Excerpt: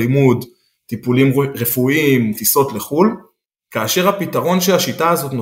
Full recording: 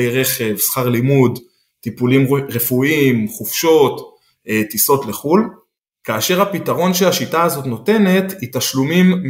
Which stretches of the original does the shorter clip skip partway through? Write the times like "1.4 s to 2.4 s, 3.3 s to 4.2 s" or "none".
3.3 s to 4.7 s